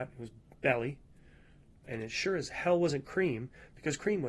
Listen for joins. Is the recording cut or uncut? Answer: cut